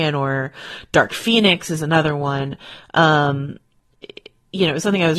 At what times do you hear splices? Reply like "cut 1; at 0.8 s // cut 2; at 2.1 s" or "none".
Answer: none